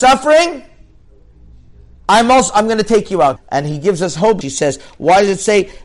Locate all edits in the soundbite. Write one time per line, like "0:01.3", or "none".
0:03.4
0:04.4